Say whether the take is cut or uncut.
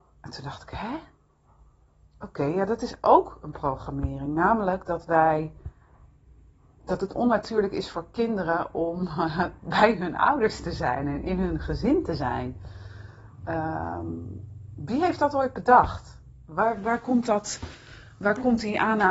uncut